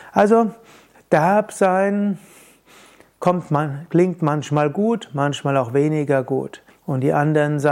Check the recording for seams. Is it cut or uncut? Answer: cut